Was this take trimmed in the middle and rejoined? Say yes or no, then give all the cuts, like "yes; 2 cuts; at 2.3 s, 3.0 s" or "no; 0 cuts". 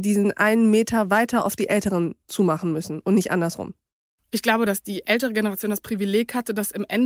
no; 0 cuts